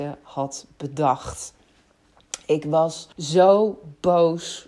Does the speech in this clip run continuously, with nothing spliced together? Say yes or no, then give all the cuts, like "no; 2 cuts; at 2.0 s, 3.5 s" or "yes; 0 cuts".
no; 1 cut; at 3.1 s